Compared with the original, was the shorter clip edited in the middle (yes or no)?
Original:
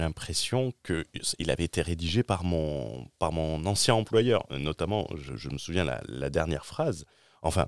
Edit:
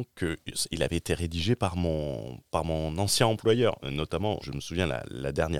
yes